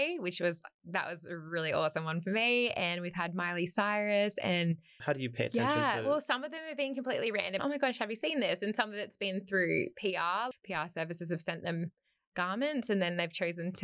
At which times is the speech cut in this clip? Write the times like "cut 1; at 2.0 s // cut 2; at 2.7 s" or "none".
cut 1; at 5.0 s // cut 2; at 7.6 s // cut 3; at 10.5 s